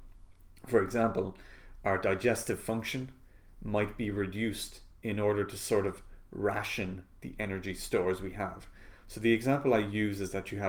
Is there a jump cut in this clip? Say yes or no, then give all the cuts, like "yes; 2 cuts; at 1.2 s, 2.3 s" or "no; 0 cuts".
no; 0 cuts